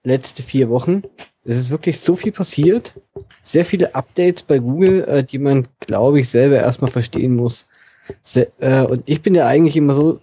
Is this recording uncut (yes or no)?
yes